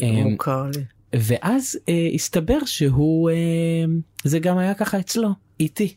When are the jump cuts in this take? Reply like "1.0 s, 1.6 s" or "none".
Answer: 1.1 s